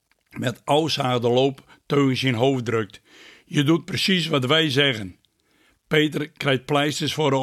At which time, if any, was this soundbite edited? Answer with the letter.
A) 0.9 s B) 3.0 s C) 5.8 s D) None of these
D